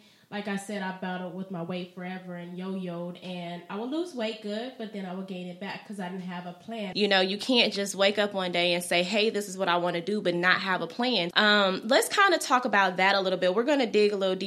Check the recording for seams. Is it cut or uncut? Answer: cut